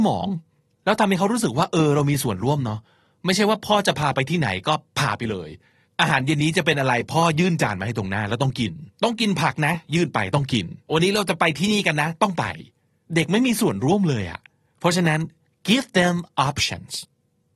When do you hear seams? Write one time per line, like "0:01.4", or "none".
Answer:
0:08.9
0:10.8